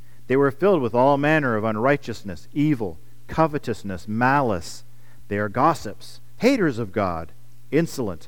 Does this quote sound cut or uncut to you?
cut